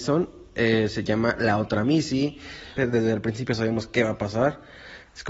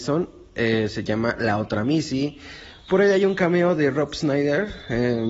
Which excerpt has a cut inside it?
first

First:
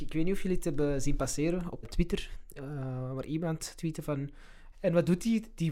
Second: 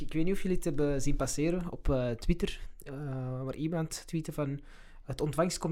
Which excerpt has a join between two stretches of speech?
first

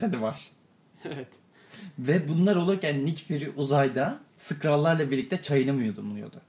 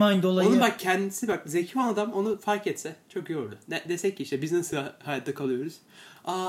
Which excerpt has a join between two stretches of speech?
first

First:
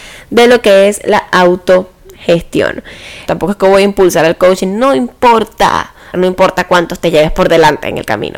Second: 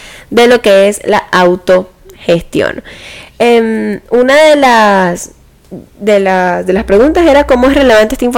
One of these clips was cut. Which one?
first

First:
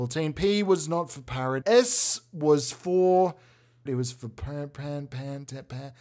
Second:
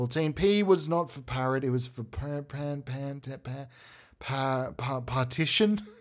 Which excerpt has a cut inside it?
first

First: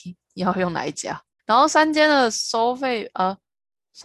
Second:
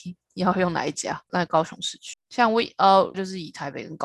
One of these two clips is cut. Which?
second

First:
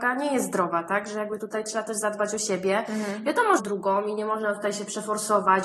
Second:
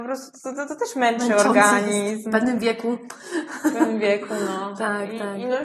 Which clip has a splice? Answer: first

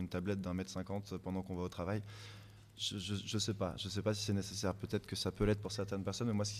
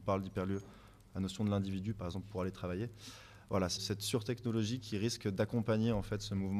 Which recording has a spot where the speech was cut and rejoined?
second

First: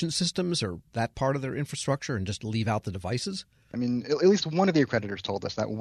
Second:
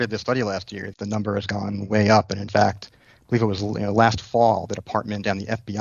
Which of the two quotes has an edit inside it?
first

